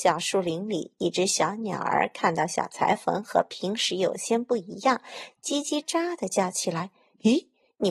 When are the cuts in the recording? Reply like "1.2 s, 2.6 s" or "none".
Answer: 5.8 s